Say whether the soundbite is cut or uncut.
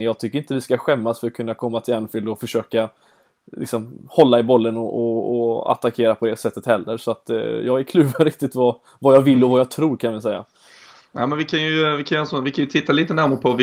uncut